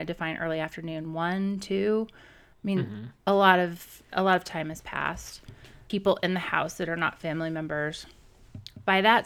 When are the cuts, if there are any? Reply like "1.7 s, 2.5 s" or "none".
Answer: none